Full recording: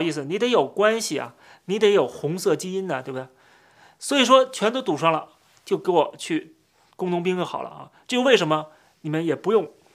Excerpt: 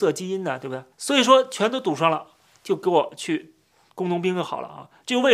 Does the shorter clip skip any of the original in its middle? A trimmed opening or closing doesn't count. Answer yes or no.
yes